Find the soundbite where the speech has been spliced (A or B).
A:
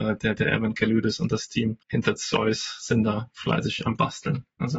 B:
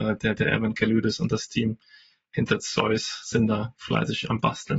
A